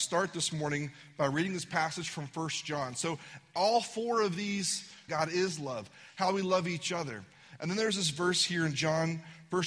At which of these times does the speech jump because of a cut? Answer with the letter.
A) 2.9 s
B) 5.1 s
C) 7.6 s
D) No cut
B